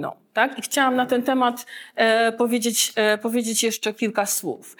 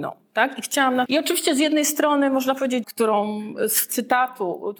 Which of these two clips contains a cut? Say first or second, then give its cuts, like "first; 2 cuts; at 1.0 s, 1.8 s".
second; 2 cuts; at 1.1 s, 2.8 s